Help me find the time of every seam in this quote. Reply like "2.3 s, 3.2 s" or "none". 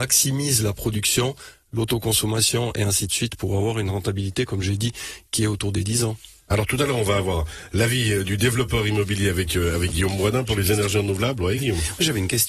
none